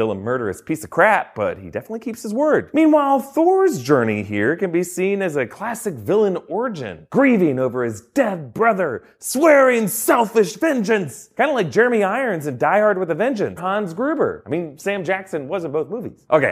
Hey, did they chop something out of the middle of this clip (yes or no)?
yes